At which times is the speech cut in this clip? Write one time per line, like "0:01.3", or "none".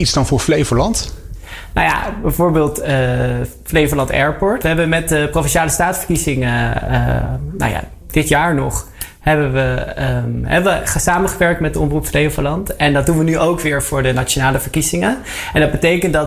0:04.6